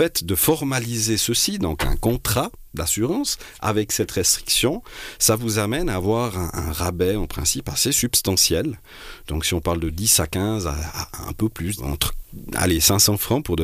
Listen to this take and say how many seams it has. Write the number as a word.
one